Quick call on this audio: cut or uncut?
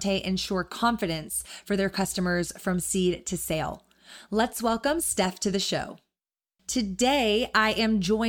cut